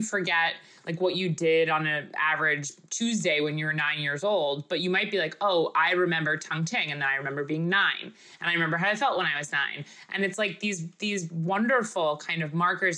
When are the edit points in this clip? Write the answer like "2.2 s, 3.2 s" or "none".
none